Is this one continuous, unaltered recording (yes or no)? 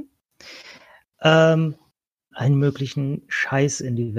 no